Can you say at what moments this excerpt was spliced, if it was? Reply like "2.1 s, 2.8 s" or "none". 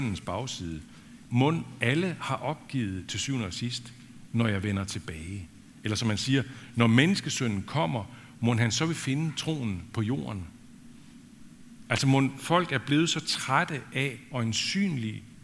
1.3 s